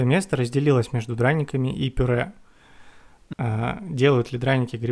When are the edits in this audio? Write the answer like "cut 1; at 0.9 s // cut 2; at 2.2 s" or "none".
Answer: cut 1; at 3.3 s